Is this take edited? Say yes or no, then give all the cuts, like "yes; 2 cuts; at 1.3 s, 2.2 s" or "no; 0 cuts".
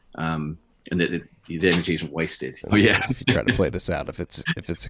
yes; 1 cut; at 2.6 s